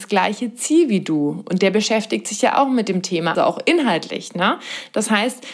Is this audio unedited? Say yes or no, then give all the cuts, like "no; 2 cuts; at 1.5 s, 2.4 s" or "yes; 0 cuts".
no; 1 cut; at 3.4 s